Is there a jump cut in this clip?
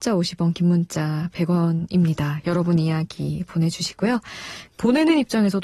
yes; 1 cut; at 4.7 s

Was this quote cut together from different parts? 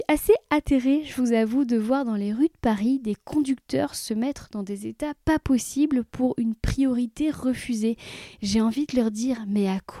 no; 0 cuts

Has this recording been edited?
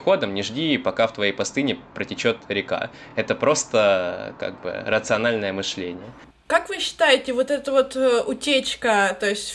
no; 0 cuts

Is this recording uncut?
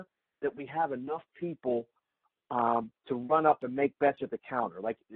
yes; 0 cuts

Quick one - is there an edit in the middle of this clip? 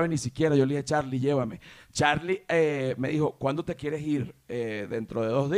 no; 0 cuts

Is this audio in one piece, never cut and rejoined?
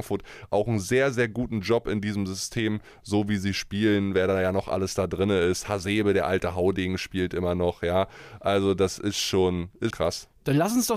no; 1 cut; at 9.9 s

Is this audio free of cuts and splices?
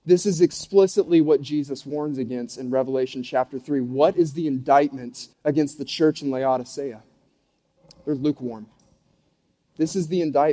no; 1 cut; at 5.3 s

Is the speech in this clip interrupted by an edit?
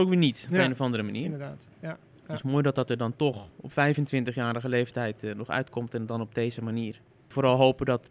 no; 0 cuts

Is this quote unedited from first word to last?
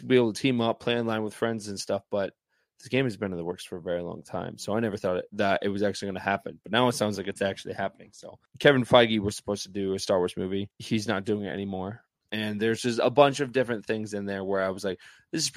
no; 1 cut; at 12.3 s

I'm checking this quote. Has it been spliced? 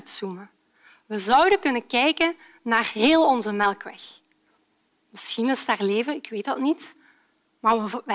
no; 0 cuts

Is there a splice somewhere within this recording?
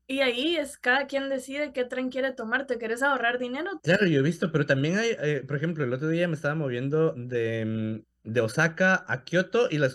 yes; 2 cuts; at 3.8 s, 8.0 s

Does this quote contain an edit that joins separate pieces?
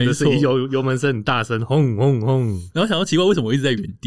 no; 0 cuts

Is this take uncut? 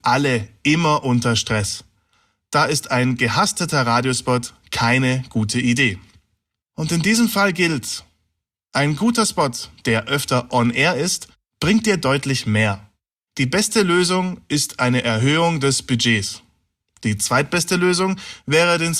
no; 2 cuts; at 6.6 s, 9.8 s

